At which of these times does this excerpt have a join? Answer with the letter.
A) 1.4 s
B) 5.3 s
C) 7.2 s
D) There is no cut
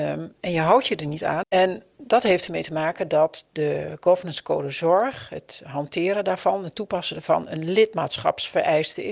A